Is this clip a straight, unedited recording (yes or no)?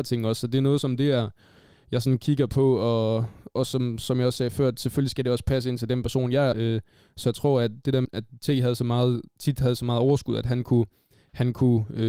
no